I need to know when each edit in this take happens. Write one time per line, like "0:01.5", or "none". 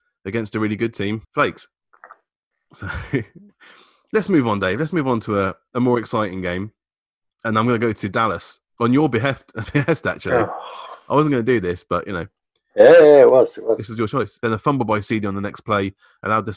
0:08.7
0:14.4

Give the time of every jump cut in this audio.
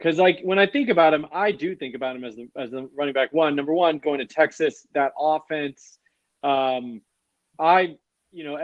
none

